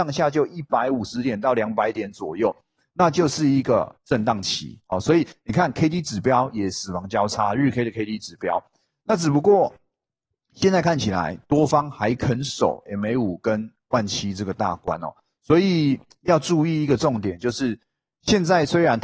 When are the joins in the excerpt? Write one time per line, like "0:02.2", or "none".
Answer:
none